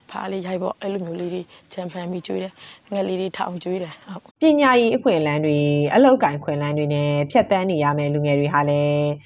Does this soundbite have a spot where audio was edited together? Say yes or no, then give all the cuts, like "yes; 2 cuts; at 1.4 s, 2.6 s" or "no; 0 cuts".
yes; 1 cut; at 4.3 s